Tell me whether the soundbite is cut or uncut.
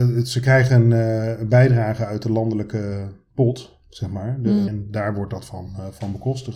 cut